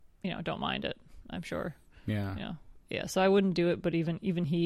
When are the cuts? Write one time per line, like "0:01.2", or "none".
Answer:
0:02.8